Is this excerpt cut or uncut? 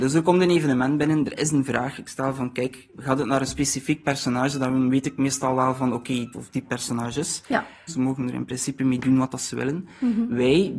cut